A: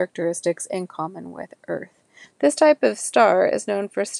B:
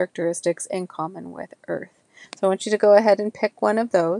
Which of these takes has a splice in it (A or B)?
A